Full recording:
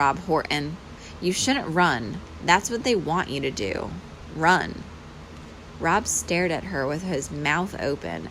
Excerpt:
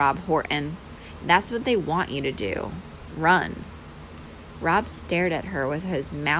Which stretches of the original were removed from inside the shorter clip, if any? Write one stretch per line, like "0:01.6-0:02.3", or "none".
0:01.2-0:02.4

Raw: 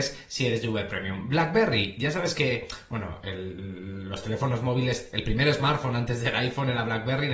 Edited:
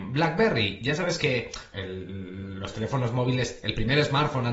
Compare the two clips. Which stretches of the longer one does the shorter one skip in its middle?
0:02.9-0:03.2

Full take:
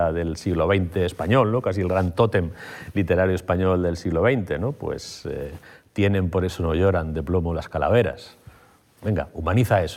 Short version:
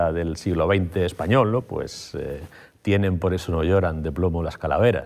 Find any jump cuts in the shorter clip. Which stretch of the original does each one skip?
0:01.6-0:04.7

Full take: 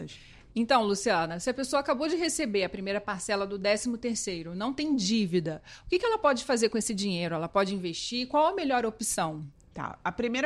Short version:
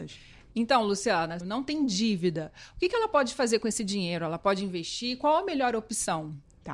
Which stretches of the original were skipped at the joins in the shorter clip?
0:01.4-0:04.5

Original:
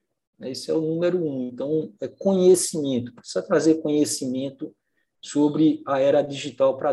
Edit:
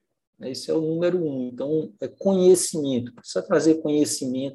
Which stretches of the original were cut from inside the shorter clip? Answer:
none

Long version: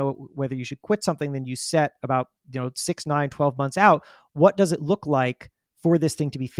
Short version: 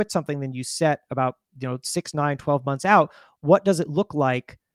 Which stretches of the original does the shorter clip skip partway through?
none

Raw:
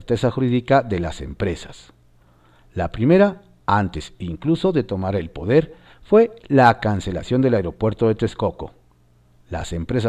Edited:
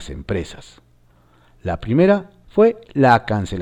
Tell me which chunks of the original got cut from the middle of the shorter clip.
0:03.5-0:06.0

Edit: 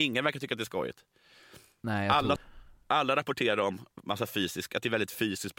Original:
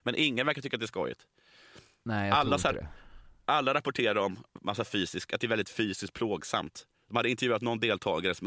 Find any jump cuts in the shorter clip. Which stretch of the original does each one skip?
0:02.6-0:02.9

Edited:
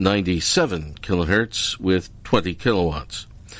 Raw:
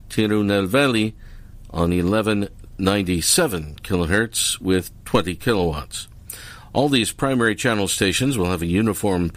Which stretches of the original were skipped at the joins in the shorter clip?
none

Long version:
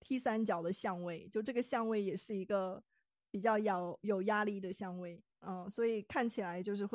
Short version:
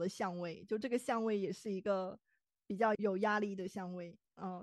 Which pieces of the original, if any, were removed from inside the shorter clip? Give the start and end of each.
0:03.6-0:04.0

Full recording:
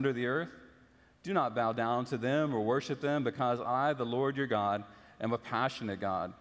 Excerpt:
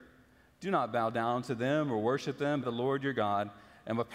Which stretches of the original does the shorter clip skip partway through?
0:03.2-0:03.9

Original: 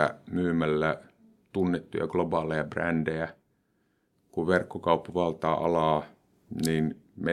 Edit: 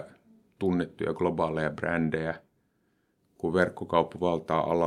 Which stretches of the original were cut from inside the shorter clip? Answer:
none

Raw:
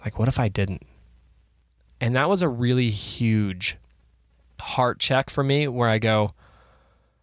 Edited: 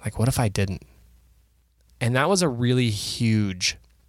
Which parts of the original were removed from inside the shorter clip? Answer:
none

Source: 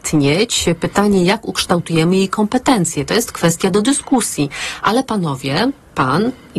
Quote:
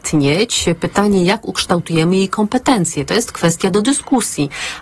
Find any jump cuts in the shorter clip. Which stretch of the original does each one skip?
none

